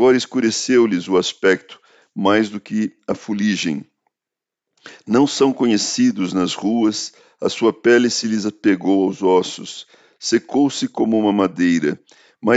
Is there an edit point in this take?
no; 0 cuts

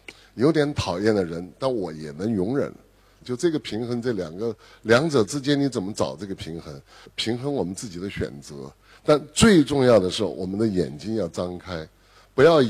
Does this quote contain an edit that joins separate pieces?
yes; 2 cuts; at 3.2 s, 7.1 s

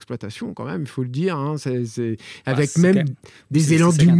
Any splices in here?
no; 0 cuts

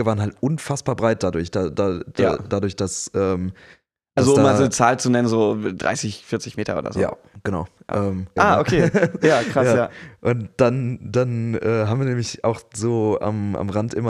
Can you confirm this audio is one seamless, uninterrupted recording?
no; 1 cut; at 8.4 s

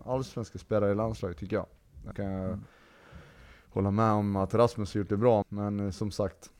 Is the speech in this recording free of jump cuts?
no; 2 cuts; at 2.1 s, 5.4 s

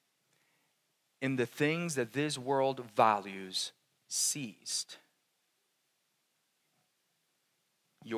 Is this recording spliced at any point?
no; 0 cuts

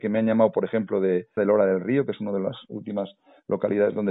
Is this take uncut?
no; 1 cut; at 1.4 s

